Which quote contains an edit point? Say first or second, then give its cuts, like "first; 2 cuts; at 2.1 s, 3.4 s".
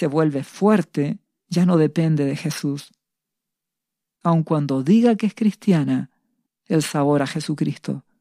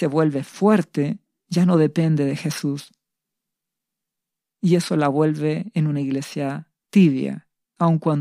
first; 2 cuts; at 4.2 s, 6.5 s